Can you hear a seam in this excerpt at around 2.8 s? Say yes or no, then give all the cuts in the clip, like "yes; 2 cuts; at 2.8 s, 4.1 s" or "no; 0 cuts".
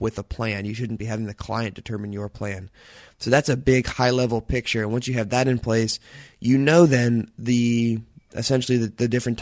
no; 0 cuts